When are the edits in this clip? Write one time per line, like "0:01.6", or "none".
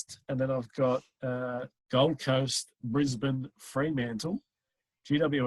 0:01.7